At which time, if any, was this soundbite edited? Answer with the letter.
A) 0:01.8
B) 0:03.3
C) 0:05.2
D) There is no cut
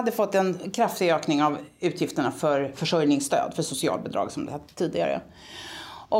D